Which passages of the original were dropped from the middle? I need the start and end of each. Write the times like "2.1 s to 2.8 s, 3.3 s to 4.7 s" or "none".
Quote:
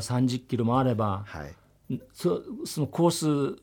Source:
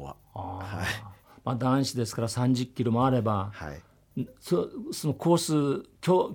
none

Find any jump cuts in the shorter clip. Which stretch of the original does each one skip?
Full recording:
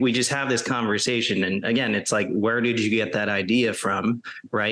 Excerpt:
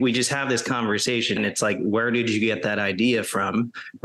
1.4 s to 1.9 s

